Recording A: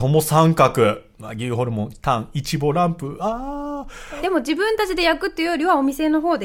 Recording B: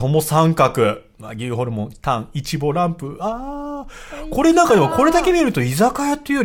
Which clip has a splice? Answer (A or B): A